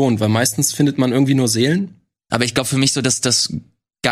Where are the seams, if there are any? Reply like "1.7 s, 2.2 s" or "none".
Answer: 2.3 s